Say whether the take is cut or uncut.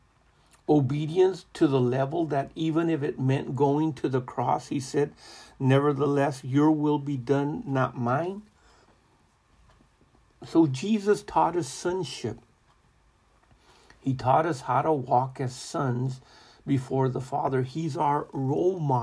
uncut